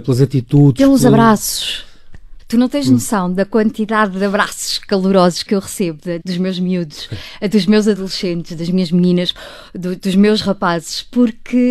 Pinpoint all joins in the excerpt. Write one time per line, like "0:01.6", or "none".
0:02.4
0:06.2